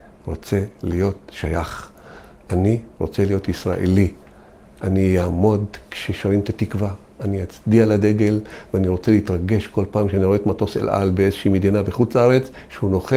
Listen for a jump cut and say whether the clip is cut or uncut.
uncut